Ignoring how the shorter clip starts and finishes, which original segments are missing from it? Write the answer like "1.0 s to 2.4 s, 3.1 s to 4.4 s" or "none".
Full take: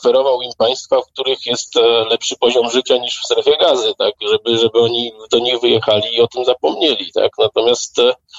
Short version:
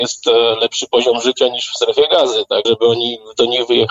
4.1 s to 4.6 s